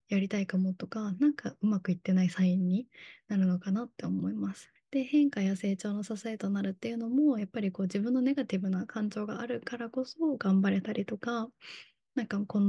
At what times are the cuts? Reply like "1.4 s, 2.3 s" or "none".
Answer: 4.8 s